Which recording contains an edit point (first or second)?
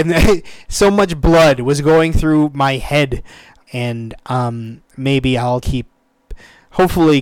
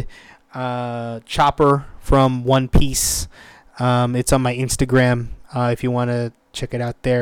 first